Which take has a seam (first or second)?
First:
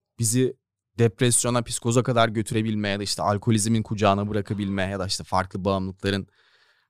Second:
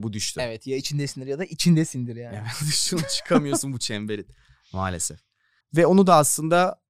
second